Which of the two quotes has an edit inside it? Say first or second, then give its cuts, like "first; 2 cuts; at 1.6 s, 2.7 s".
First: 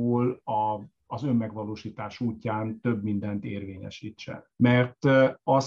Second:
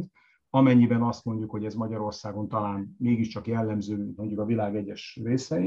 first; 1 cut; at 4.5 s